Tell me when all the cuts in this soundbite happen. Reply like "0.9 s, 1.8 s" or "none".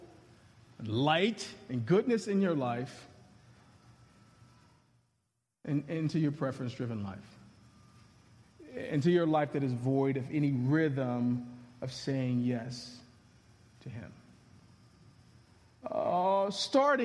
15.8 s